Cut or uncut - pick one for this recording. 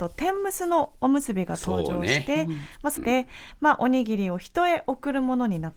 cut